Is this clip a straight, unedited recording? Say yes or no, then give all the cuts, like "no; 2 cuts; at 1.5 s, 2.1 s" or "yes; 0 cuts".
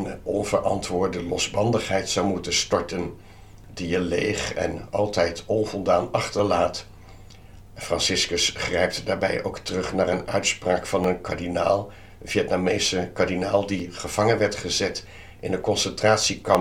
no; 1 cut; at 7.6 s